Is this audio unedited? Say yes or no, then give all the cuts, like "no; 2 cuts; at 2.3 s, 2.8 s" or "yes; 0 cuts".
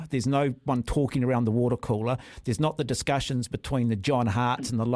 yes; 0 cuts